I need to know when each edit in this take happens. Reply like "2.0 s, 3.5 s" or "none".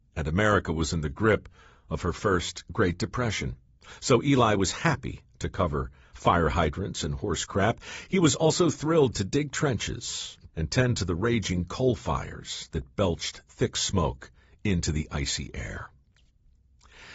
10.5 s

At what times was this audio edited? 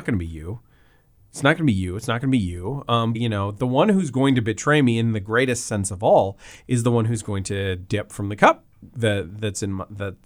3.1 s, 8.1 s

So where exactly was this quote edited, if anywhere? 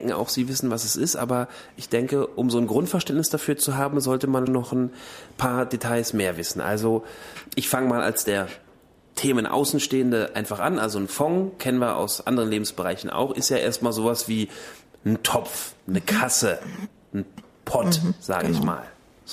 4.5 s

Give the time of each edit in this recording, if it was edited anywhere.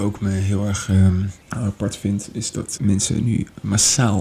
1.4 s, 2.8 s

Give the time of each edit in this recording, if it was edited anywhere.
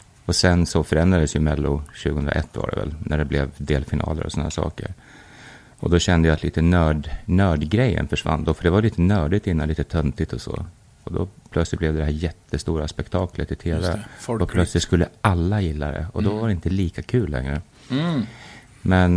none

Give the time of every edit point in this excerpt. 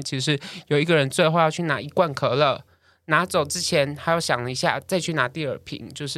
none

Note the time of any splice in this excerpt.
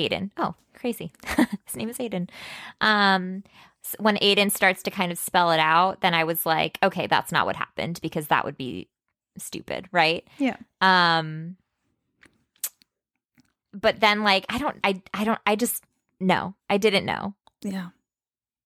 14.8 s

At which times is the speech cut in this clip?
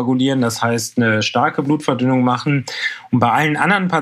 none

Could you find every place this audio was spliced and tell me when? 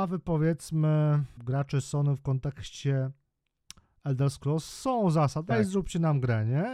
1.4 s, 5.5 s

